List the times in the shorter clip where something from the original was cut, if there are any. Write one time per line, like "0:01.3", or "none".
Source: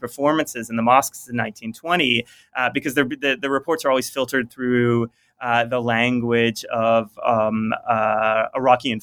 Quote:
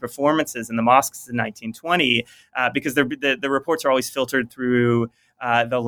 none